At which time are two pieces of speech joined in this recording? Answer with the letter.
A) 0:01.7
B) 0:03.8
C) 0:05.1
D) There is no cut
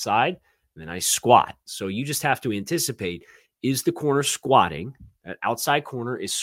A